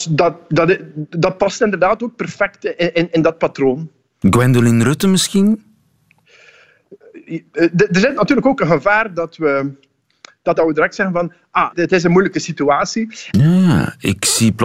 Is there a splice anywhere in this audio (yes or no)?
yes